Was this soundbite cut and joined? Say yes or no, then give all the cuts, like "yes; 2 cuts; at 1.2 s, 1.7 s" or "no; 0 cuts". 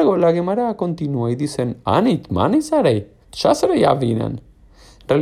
yes; 1 cut; at 3.2 s